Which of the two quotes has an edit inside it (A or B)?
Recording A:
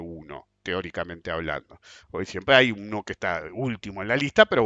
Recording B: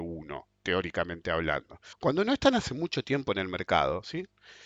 B